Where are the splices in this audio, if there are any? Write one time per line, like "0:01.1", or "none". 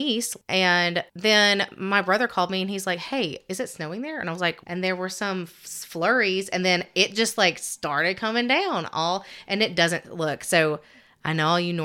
0:04.6